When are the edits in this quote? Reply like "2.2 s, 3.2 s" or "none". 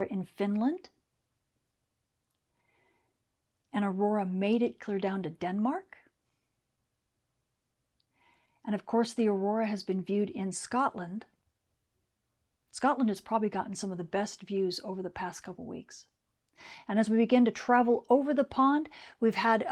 none